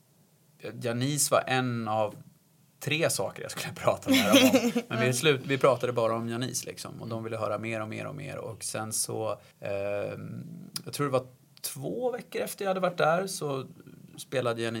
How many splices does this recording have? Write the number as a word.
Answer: one